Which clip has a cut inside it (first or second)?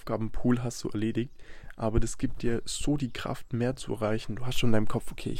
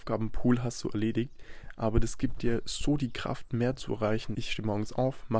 second